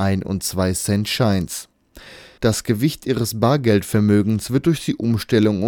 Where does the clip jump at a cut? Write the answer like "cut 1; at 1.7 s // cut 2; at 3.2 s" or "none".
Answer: cut 1; at 2.4 s